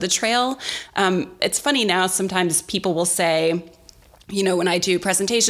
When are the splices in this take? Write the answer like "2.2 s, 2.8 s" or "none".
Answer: none